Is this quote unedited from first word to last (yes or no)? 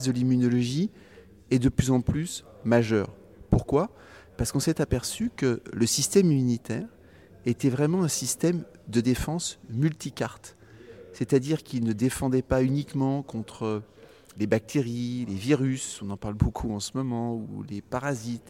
yes